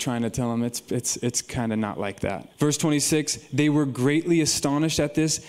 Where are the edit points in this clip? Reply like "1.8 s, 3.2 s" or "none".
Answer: 2.5 s

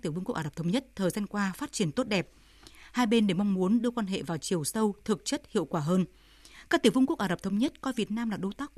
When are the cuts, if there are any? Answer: none

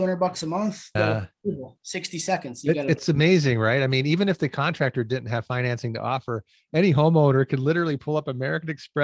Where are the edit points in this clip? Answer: 0.9 s

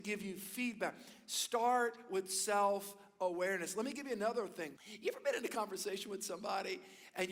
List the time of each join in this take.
4.8 s

